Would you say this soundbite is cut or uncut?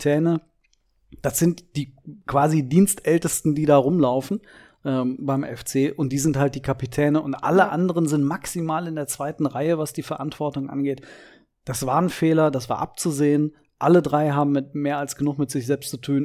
uncut